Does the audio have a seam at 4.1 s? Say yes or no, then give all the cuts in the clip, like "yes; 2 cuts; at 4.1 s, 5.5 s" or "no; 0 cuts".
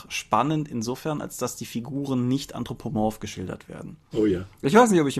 yes; 1 cut; at 4.1 s